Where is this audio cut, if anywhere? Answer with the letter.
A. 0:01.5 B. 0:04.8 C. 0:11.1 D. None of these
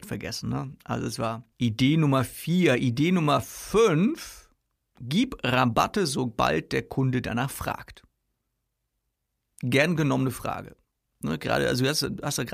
A